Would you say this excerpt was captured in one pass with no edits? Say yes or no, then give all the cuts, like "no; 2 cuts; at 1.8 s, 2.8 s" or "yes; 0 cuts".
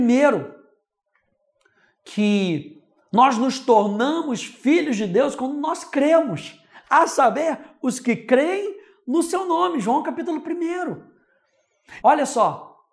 no; 1 cut; at 12.0 s